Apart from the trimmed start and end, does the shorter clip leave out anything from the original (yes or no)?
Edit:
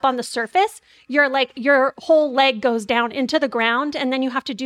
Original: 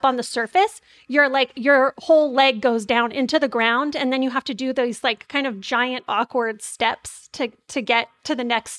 no